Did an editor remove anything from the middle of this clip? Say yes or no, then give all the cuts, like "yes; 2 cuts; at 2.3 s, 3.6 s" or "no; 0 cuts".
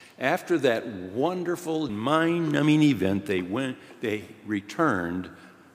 yes; 1 cut; at 1.9 s